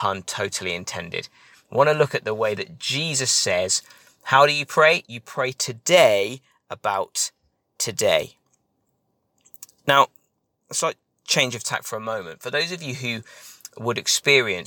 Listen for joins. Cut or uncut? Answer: uncut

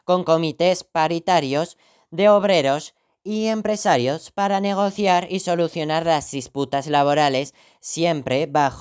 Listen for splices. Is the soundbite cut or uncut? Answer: uncut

